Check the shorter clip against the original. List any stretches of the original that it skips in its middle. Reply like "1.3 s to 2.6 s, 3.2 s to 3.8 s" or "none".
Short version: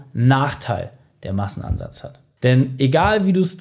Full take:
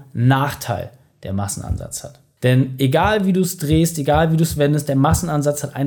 none